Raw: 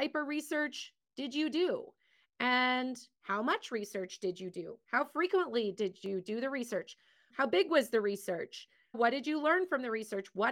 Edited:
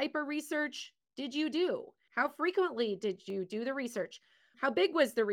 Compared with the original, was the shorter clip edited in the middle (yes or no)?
yes